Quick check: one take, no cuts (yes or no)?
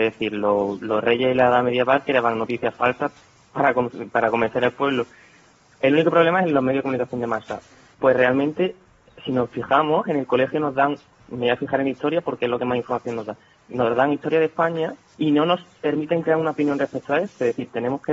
no